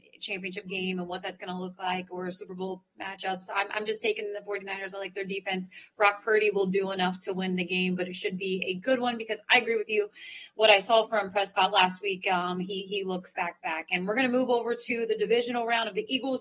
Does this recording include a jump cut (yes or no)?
yes